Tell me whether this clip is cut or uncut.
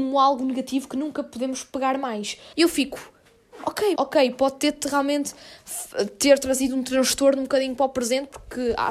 cut